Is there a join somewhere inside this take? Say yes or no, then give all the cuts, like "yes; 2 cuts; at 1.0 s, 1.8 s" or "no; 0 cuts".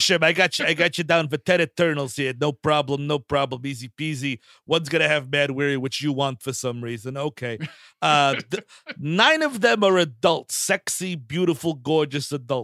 no; 0 cuts